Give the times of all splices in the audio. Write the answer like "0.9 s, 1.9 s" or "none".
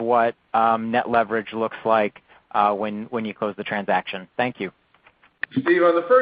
none